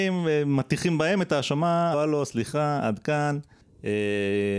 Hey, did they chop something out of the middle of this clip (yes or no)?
yes